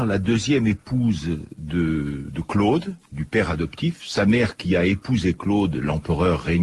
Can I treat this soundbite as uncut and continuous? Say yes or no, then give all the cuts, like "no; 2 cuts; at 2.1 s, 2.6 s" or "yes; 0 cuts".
yes; 0 cuts